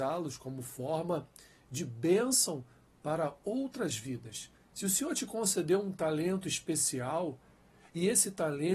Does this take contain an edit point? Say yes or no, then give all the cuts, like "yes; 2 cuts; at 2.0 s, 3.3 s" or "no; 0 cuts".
yes; 1 cut; at 4.6 s